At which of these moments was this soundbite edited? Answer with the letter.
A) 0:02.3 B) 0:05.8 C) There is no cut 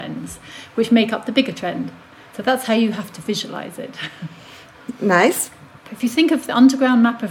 B